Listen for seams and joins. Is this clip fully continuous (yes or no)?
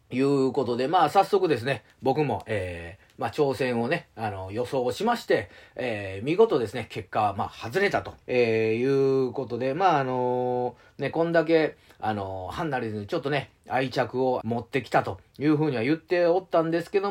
no